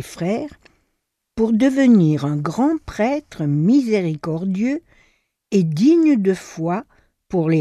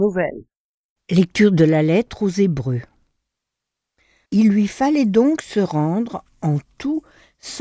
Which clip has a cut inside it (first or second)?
second